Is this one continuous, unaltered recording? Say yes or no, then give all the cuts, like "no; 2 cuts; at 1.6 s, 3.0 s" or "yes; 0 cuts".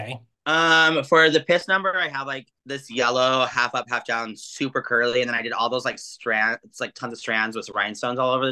yes; 0 cuts